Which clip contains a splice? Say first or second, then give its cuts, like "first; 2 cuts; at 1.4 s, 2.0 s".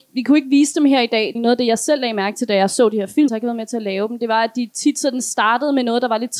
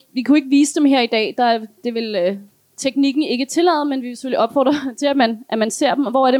first; 2 cuts; at 1.3 s, 3.3 s